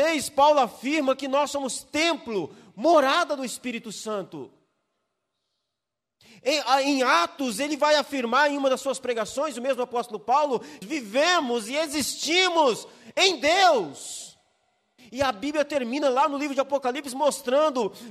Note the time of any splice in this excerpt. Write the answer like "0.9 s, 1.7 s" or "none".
10.8 s, 15.0 s